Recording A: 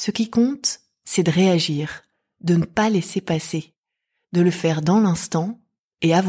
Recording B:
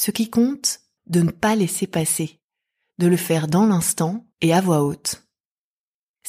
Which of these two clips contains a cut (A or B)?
B